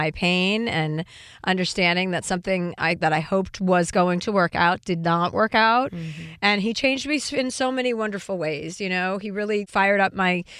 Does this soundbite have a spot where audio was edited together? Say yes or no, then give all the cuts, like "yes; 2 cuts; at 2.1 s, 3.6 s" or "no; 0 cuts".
yes; 1 cut; at 3.0 s